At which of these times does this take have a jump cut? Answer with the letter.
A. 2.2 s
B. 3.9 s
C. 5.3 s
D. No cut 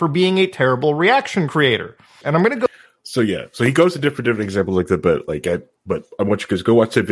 A